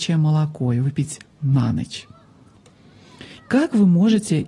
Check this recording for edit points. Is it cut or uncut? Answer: cut